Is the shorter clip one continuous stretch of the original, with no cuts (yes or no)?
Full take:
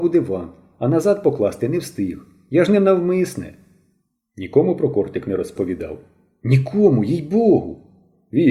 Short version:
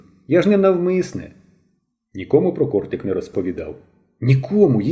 yes